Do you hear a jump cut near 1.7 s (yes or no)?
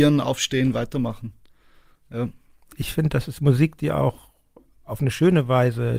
no